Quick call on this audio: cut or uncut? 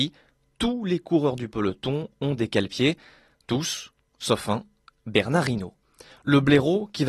uncut